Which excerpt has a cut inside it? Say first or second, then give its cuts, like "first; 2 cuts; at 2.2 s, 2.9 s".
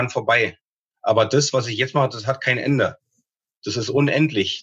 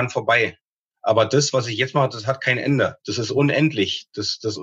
second; 1 cut; at 3.0 s